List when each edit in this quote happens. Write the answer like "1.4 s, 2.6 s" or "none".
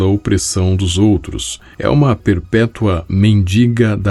1.8 s